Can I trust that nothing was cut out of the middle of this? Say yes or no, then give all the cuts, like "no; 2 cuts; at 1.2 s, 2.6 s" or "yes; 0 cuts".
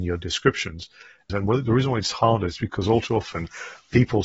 no; 1 cut; at 1.3 s